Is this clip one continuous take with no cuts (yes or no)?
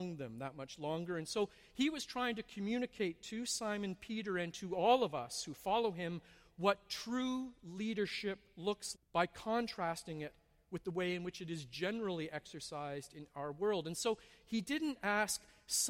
no